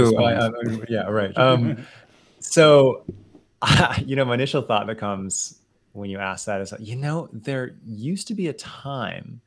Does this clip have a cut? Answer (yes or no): yes